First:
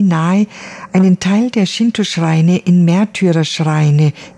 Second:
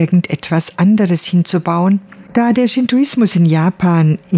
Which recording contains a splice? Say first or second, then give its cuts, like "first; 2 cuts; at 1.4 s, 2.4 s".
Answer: second; 1 cut; at 2.3 s